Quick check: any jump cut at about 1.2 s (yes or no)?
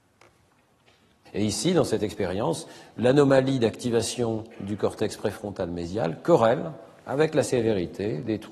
yes